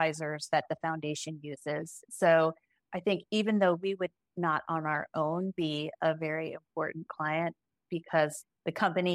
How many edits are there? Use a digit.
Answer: 1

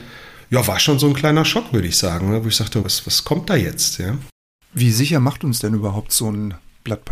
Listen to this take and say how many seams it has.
1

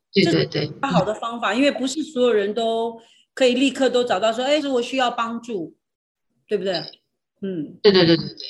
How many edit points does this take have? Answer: 1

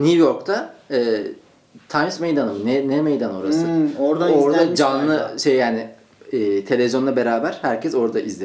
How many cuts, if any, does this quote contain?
0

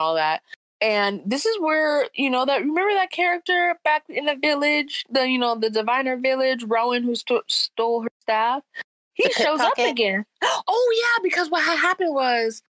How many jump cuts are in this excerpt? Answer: 0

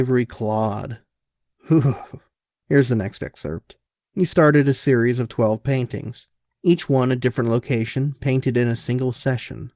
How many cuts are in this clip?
0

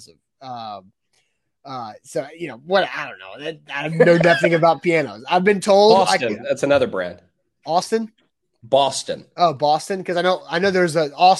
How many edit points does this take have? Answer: 0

